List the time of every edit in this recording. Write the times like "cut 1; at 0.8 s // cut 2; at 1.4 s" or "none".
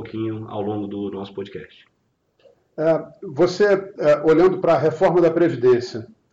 none